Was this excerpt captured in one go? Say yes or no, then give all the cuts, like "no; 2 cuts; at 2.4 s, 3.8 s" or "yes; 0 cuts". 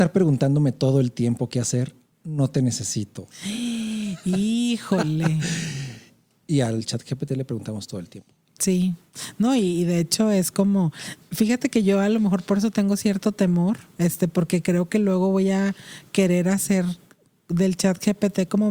yes; 0 cuts